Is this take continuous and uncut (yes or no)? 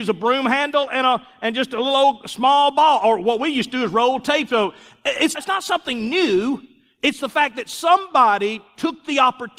no